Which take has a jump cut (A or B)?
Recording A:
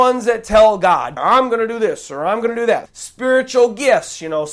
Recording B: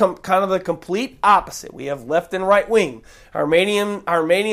A